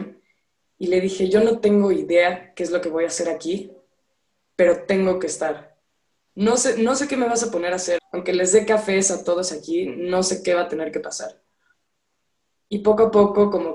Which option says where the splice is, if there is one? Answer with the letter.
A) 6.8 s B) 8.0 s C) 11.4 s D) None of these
B